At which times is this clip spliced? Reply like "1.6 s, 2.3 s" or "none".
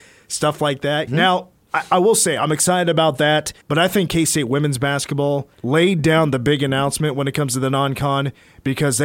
1.1 s, 3.6 s, 5.5 s

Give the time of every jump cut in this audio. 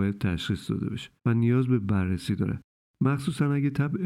1.2 s

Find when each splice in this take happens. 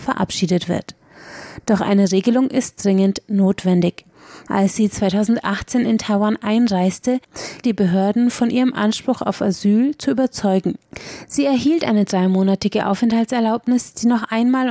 4.5 s, 7.6 s

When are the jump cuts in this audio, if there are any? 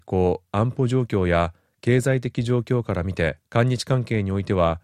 3.5 s

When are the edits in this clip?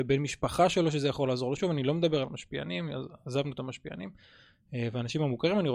1.6 s

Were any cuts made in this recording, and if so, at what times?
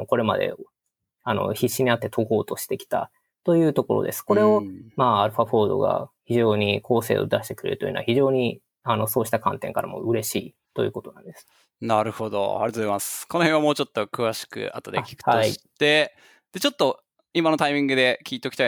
none

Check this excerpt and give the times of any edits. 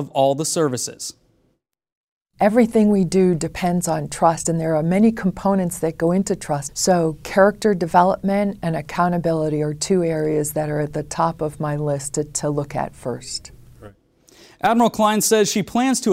6.7 s

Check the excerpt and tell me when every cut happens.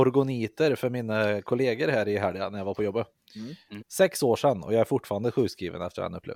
3.8 s

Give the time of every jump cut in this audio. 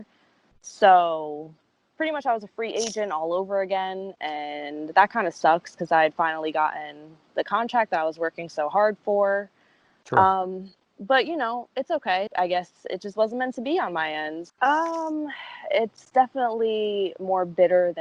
12.3 s, 14.5 s

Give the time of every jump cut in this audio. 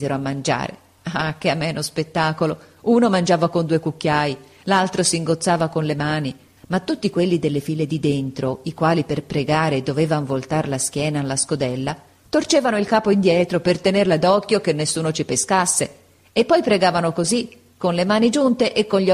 6.6 s

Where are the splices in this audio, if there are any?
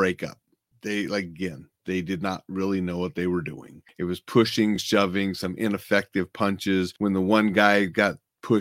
none

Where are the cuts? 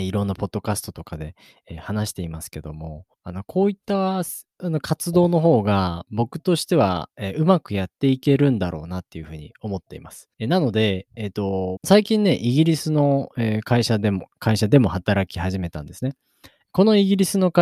3.1 s, 10.3 s, 11.8 s

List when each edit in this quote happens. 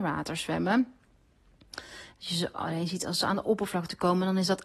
2.1 s

